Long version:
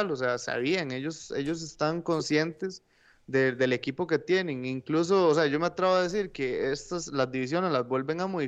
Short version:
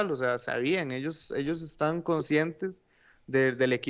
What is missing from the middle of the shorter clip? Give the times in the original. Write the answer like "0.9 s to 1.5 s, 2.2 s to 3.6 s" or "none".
none